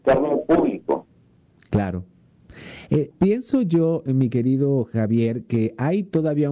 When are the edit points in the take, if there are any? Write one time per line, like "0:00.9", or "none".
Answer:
0:03.1